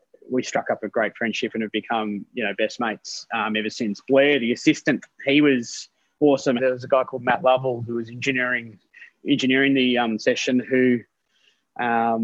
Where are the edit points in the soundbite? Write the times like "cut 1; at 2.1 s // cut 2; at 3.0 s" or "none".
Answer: cut 1; at 6.6 s